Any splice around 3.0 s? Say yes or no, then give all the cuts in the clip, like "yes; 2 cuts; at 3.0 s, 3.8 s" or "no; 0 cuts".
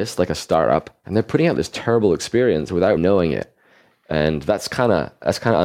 yes; 2 cuts; at 1.0 s, 3.0 s